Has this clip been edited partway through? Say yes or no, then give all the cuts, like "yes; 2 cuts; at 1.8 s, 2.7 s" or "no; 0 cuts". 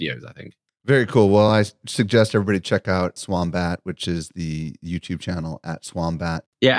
no; 0 cuts